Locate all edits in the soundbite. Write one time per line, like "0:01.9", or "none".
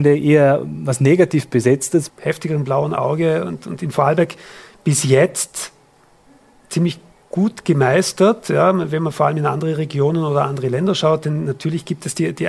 0:02.1

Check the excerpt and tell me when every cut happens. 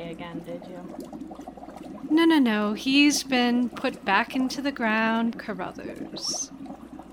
0:05.3

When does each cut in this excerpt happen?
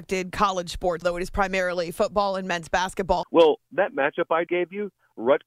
0:01.0
0:03.2
0:04.5

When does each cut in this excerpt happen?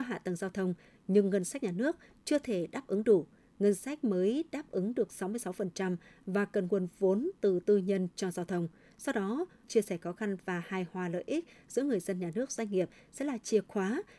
0:09.6

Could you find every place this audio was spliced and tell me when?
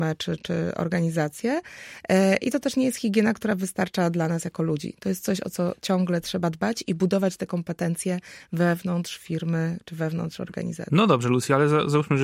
none

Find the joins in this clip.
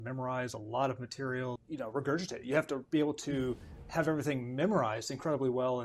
0:01.6

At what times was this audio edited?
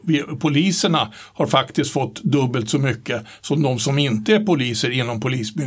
none

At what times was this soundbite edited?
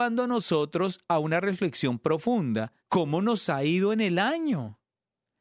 0:02.8

